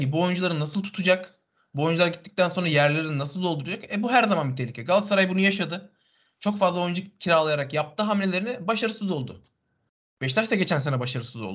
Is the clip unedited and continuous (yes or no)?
yes